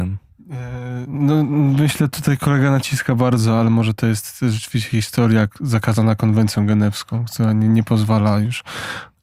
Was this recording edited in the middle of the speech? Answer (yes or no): no